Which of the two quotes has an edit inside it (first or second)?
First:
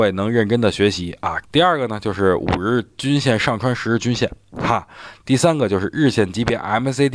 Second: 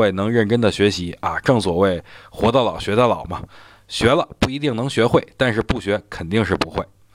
first